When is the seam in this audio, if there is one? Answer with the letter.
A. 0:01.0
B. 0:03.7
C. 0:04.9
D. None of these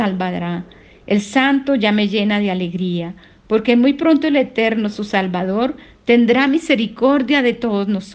D